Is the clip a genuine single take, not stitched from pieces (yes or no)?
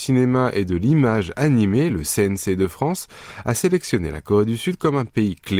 yes